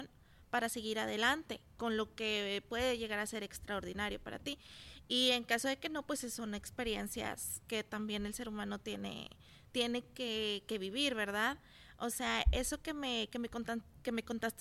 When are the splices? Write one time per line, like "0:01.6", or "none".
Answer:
none